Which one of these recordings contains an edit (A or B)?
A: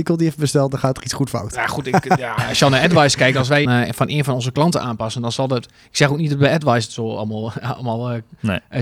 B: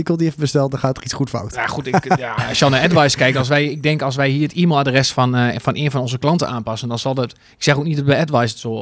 A